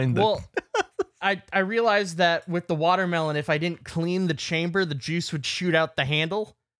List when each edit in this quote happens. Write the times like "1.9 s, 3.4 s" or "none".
1.2 s, 5.4 s